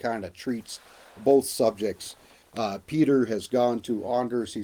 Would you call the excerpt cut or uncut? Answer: uncut